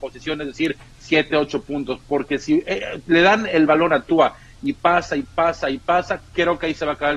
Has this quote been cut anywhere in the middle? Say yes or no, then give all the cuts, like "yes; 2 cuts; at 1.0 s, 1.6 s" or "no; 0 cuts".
no; 0 cuts